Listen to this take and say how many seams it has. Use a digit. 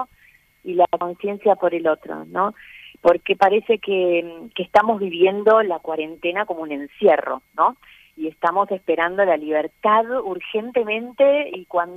0